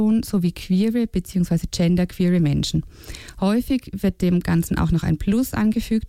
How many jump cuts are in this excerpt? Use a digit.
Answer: 0